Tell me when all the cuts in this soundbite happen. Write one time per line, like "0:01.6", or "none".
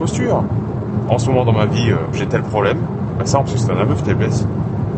0:01.1
0:03.4